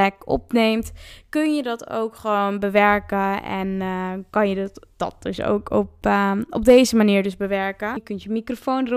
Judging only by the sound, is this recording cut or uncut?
cut